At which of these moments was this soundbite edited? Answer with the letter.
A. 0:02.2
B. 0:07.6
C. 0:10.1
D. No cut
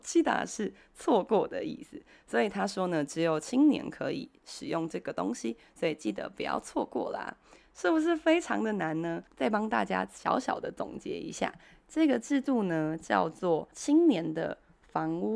D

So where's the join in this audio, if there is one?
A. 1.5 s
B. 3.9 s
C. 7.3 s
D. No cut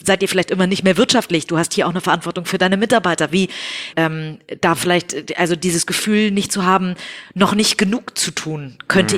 B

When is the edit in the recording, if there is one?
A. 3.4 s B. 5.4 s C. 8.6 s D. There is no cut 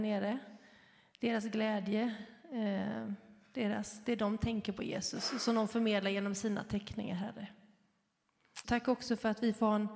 C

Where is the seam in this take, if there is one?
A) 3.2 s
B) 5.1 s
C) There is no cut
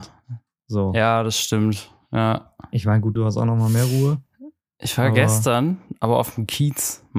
A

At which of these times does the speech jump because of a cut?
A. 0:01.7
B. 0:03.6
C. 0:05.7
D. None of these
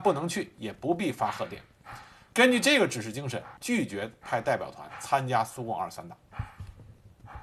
B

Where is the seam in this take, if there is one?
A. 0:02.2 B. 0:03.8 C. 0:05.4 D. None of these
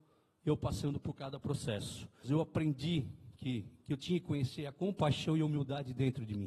A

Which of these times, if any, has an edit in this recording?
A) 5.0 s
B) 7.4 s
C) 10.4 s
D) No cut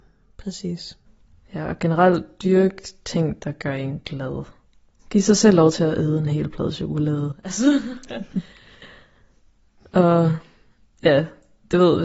A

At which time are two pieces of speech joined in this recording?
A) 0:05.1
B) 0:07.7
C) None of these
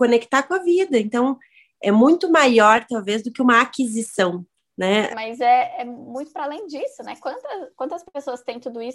A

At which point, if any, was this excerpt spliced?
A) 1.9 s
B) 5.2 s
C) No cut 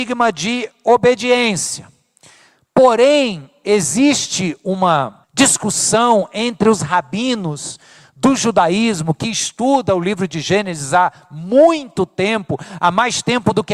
B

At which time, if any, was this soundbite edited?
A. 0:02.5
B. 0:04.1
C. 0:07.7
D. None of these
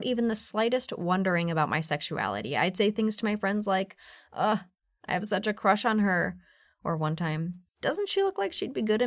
C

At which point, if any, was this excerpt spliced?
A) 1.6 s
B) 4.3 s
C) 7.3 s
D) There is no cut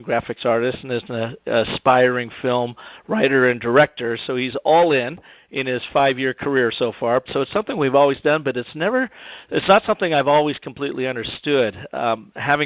C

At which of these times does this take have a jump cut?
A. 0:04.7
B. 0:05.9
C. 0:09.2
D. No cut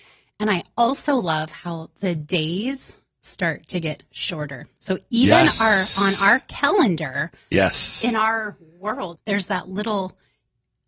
C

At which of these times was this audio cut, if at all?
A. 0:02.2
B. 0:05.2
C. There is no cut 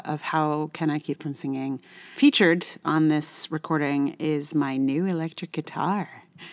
A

